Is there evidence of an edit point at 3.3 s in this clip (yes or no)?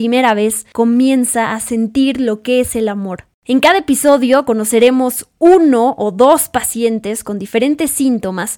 no